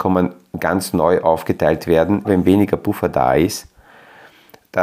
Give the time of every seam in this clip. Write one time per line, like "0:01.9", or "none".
0:02.2